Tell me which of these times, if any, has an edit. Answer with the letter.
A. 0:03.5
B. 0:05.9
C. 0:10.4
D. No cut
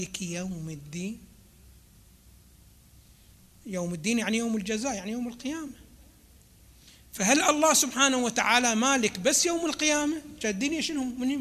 D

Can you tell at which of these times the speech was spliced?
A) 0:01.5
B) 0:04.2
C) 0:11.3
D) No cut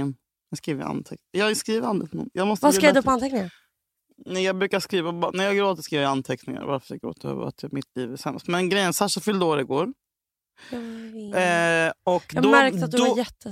D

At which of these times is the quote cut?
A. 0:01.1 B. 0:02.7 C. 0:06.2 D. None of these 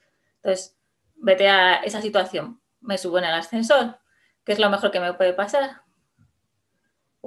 A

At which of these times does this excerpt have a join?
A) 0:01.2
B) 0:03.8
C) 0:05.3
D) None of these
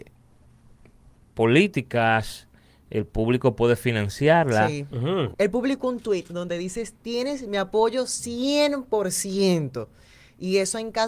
C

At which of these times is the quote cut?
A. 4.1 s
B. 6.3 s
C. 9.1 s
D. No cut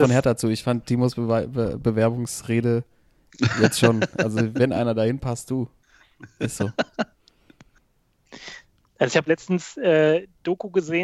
D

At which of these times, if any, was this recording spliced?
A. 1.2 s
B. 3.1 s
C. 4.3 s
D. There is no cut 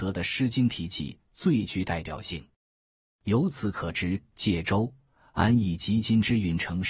B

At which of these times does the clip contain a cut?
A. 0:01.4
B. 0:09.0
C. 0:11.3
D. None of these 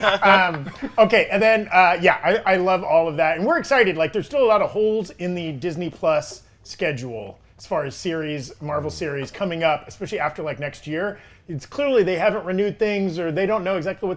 D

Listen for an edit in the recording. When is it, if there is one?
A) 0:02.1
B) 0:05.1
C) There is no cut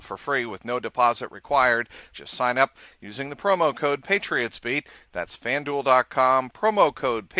A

